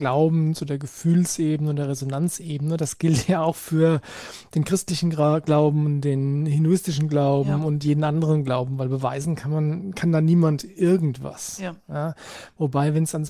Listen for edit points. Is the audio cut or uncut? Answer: uncut